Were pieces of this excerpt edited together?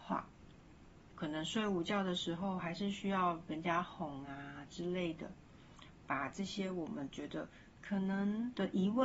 yes; 1 cut; at 1.1 s

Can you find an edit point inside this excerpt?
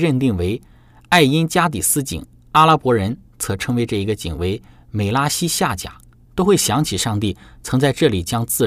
yes; 1 cut; at 6.3 s

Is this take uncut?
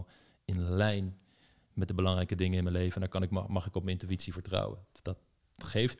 yes; 0 cuts

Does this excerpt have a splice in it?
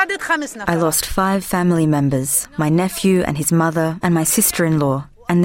yes; 1 cut; at 4.0 s

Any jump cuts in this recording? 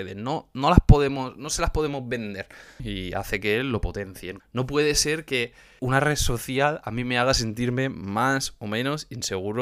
yes; 3 cuts; at 2.8 s, 4.4 s, 5.8 s

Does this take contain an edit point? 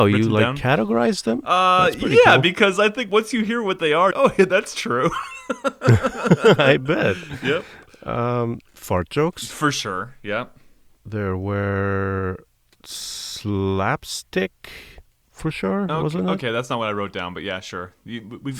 yes; 1 cut; at 4.1 s

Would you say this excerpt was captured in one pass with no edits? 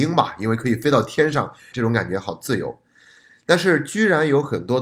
no; 1 cut; at 1.7 s

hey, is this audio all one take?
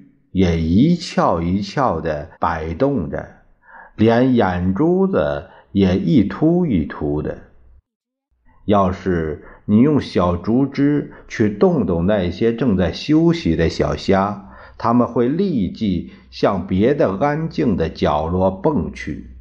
no; 2 cuts; at 2.3 s, 8.4 s

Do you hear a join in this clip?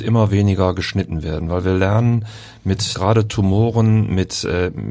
yes; 1 cut; at 2.9 s

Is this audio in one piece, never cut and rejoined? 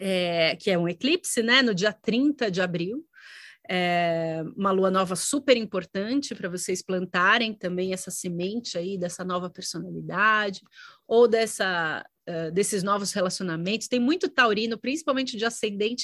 yes; 0 cuts

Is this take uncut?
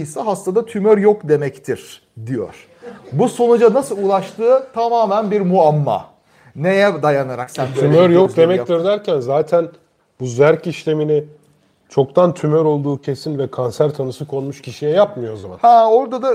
yes; 0 cuts

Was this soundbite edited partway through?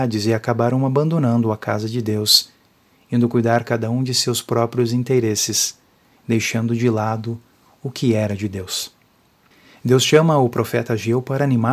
no; 0 cuts

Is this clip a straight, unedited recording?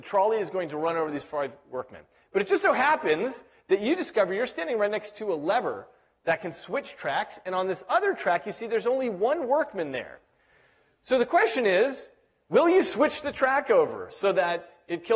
yes; 0 cuts

